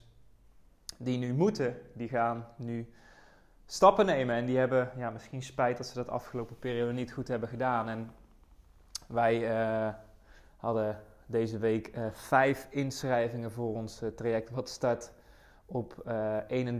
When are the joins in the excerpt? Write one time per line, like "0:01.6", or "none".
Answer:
none